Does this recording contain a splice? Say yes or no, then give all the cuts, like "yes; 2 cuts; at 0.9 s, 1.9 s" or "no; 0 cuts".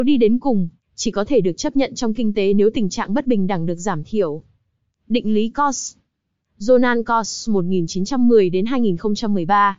no; 0 cuts